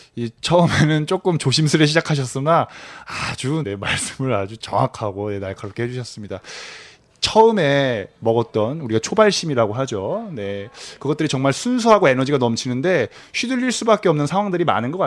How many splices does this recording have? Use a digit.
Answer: 1